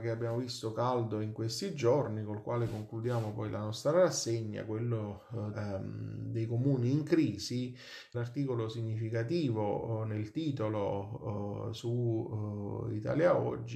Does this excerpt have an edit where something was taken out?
yes; 2 cuts; at 5.5 s, 8.1 s

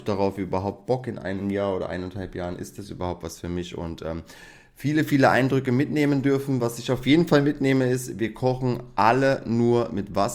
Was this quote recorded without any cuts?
yes; 0 cuts

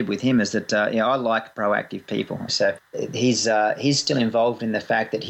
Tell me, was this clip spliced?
yes; 1 cut; at 2.5 s

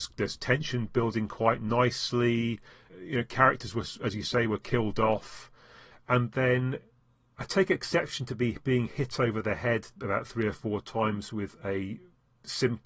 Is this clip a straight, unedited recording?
no; 1 cut; at 2.9 s

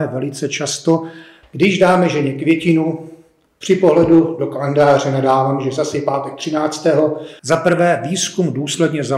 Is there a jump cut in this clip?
yes; 2 cuts; at 1.4 s, 7.4 s

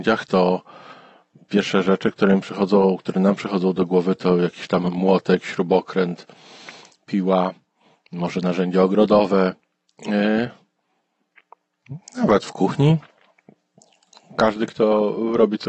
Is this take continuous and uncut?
yes; 0 cuts

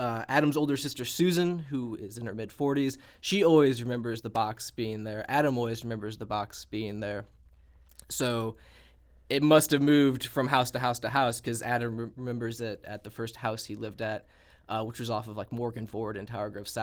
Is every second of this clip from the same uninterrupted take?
yes; 0 cuts

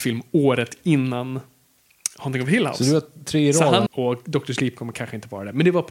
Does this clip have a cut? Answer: yes; 1 cut; at 3.9 s

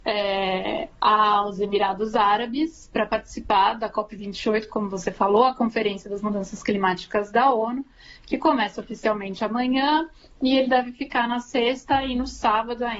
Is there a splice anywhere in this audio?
no; 0 cuts

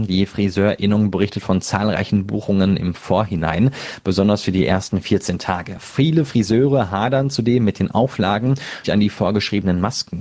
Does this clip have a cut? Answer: yes; 1 cut; at 8.8 s

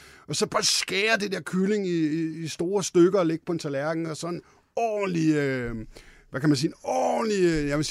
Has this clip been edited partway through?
no; 0 cuts

